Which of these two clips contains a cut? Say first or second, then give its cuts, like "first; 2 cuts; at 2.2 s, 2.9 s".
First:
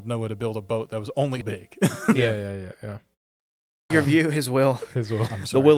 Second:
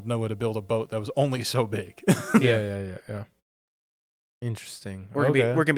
first; 2 cuts; at 1.4 s, 3.9 s